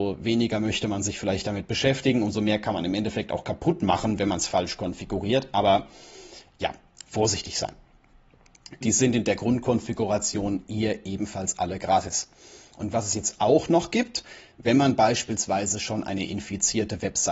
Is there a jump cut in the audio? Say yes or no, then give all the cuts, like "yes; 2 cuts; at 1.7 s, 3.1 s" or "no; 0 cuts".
yes; 1 cut; at 8.8 s